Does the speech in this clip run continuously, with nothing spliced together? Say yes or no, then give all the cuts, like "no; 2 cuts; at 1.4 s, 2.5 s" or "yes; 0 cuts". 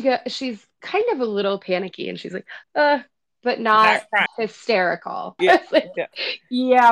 no; 3 cuts; at 2.6 s, 4.3 s, 5.4 s